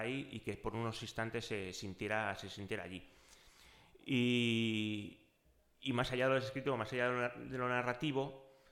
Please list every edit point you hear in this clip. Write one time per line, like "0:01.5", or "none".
none